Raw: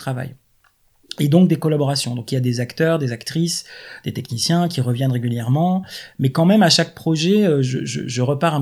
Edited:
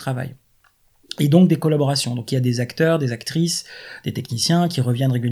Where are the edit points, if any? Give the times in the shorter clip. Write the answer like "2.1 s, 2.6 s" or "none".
none